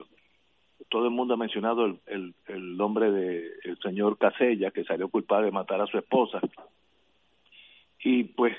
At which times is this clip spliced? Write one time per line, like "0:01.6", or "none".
none